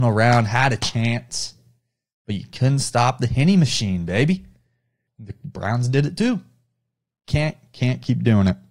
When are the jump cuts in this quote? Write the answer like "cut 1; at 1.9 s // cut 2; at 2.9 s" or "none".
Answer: cut 1; at 5.1 s

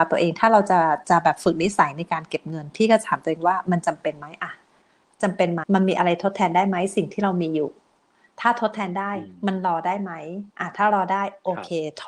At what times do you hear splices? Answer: cut 1; at 5.6 s // cut 2; at 10.5 s

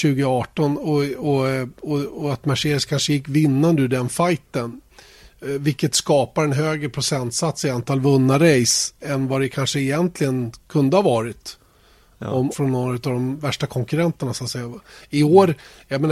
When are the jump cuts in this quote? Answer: cut 1; at 9.0 s // cut 2; at 12.5 s

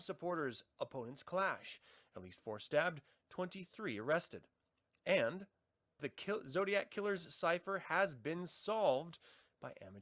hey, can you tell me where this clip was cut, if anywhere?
cut 1; at 6.0 s

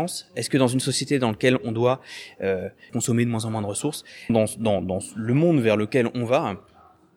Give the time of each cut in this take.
cut 1; at 2.9 s // cut 2; at 4.3 s

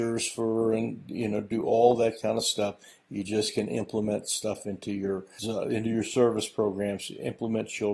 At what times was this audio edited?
cut 1; at 5.4 s

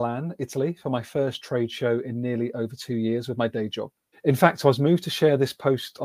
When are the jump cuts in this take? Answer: cut 1; at 4.1 s

